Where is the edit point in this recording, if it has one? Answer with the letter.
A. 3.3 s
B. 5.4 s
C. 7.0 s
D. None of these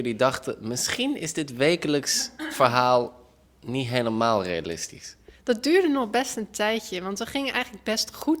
D